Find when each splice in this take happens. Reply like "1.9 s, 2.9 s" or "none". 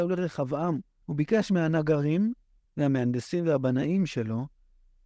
1.0 s, 2.6 s